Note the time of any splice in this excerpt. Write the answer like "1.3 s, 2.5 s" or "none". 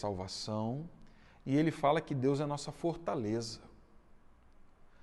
none